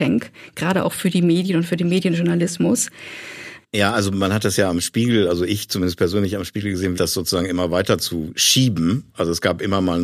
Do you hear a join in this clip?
yes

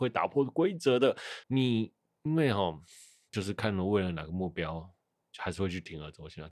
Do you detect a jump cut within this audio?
yes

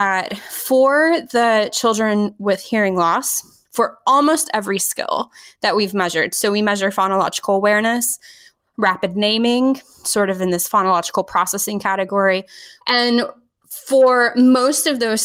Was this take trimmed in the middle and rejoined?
yes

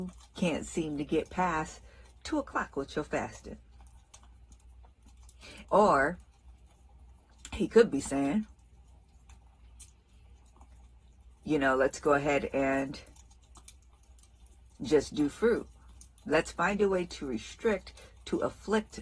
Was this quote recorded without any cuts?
no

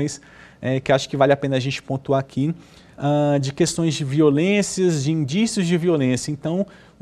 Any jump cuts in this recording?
no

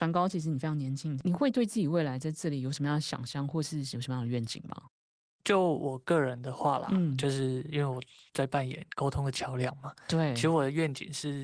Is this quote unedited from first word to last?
yes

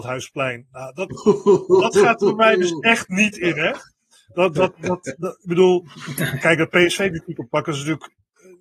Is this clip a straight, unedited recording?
yes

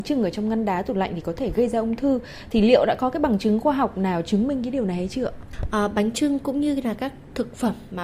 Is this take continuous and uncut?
yes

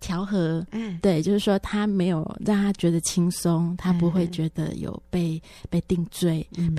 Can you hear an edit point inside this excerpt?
no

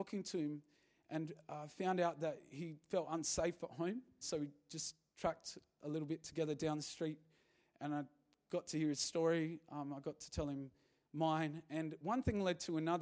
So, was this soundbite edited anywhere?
yes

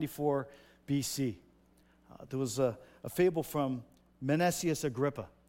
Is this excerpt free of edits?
yes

